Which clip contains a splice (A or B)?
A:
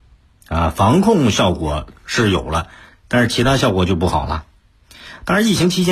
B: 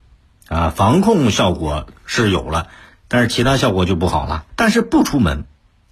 B